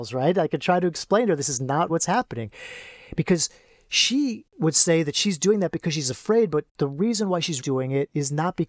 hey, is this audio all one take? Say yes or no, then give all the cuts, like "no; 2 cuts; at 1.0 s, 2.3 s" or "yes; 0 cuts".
no; 2 cuts; at 1.9 s, 7.6 s